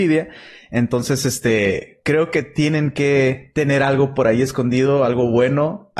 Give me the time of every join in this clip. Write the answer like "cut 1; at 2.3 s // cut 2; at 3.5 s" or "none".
none